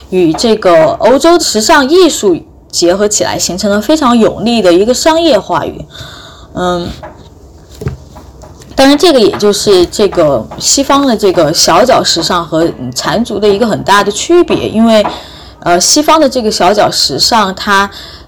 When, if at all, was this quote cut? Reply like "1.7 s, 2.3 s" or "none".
1.4 s